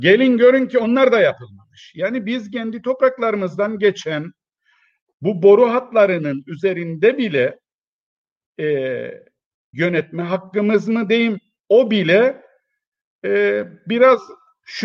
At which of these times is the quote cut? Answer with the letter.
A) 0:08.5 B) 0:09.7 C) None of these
B